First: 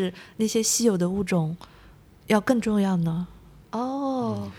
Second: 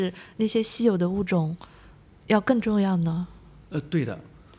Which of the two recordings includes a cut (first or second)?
first